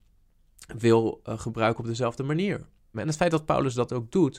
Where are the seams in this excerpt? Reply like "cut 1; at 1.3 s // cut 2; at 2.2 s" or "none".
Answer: cut 1; at 2.9 s